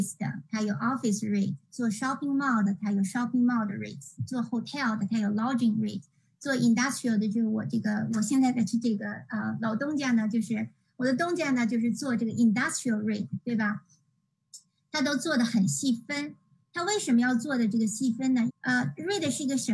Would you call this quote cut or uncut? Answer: cut